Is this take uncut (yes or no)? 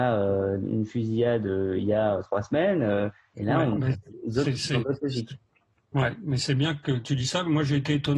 no